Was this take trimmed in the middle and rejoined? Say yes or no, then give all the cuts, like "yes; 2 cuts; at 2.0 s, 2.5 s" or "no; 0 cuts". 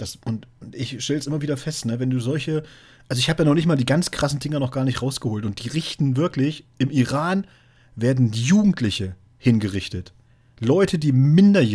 no; 0 cuts